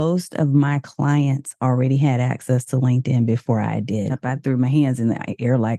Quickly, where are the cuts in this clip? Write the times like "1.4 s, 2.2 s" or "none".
4.1 s